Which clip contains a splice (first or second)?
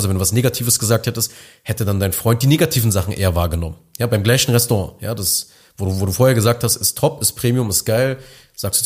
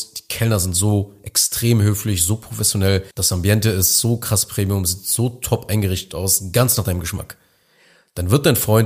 second